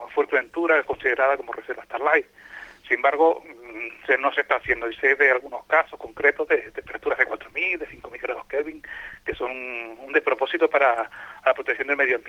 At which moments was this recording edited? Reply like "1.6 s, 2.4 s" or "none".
none